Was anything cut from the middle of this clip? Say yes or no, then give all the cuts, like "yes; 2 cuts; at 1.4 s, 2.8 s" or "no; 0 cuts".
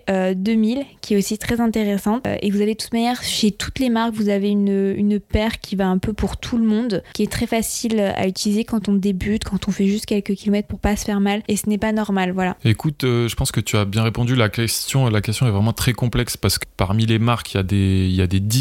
yes; 1 cut; at 11.5 s